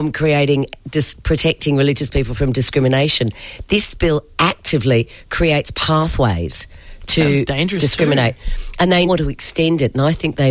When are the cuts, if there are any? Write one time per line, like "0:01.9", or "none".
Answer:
0:09.1